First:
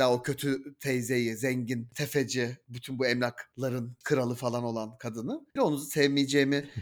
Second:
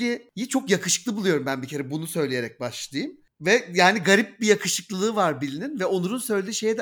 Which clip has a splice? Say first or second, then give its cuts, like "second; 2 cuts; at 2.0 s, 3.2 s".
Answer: first; 1 cut; at 5.6 s